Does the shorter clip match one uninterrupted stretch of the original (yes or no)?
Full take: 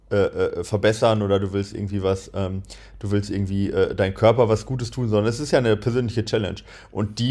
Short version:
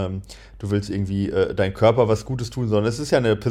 yes